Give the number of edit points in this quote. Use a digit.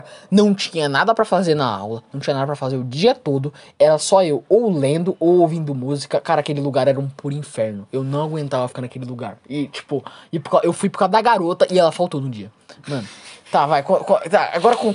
0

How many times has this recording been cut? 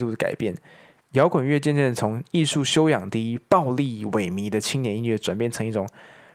1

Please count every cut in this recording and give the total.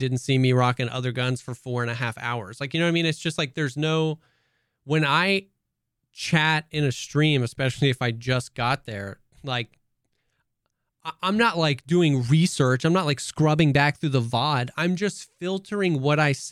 0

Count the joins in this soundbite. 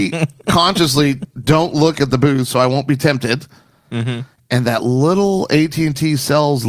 0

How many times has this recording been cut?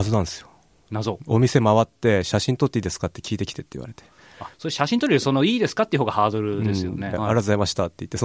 2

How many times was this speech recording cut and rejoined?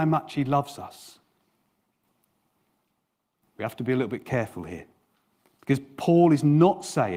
1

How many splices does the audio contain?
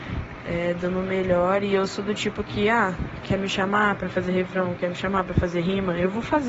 0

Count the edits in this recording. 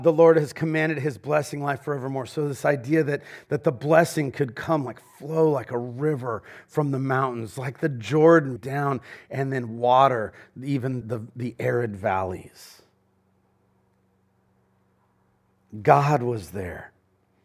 2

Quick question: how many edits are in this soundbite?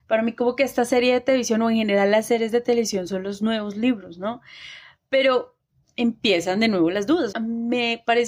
1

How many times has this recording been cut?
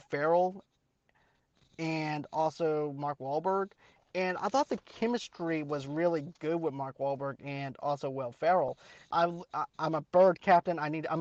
1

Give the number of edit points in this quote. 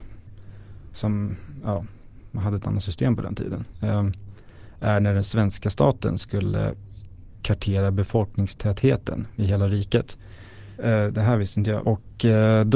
3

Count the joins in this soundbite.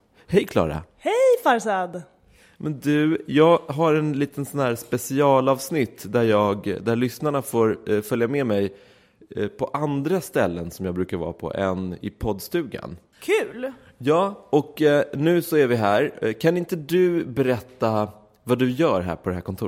0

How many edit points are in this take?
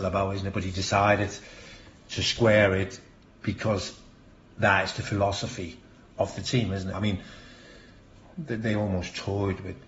1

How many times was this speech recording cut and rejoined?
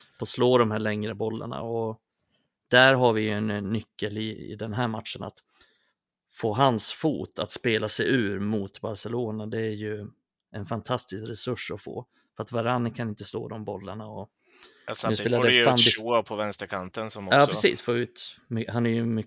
0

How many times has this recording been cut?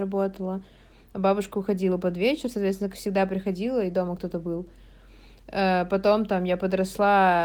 0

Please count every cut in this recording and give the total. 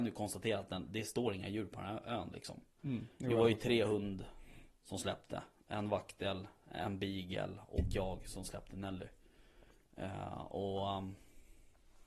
1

